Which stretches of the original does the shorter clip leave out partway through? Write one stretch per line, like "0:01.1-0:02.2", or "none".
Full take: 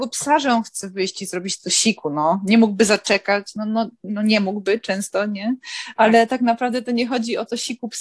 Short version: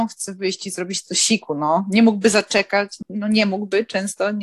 0:03.6-0:04.0